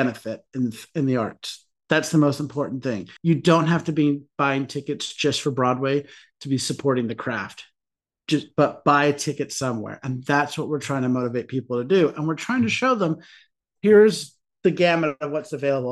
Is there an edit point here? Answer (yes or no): yes